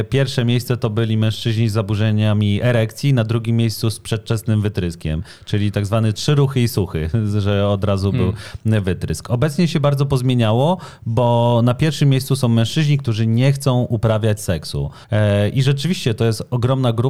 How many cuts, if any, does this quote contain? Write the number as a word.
one